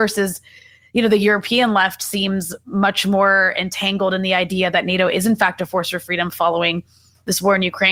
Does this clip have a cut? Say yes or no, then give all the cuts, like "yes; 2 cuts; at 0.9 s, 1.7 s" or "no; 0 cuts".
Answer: no; 0 cuts